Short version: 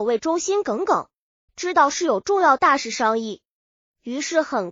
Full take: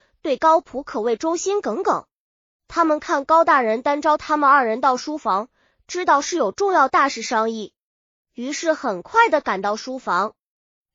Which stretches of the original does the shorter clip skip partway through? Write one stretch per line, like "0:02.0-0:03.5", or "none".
0:02.5-0:05.8